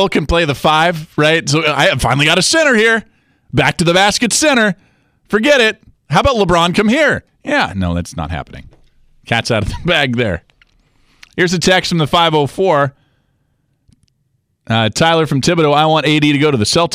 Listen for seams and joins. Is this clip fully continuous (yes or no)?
yes